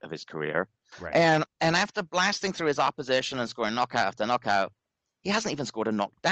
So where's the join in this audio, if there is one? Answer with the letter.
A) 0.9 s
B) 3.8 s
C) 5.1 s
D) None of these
A